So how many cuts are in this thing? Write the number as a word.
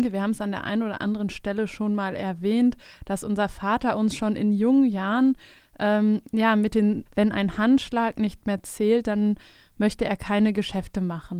one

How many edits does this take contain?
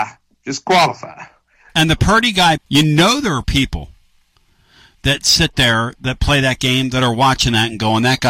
one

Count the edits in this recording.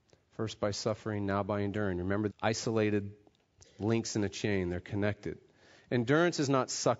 one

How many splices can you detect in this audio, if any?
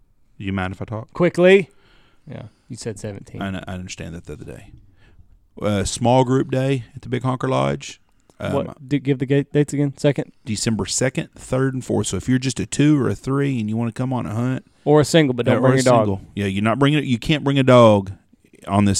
one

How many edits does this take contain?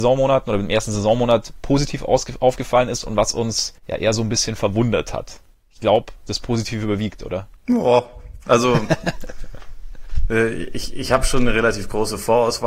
one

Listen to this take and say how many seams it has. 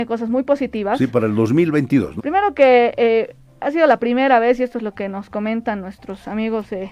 one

